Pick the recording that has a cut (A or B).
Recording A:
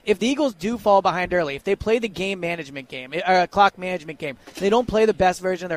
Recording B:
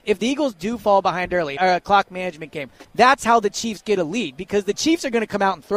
B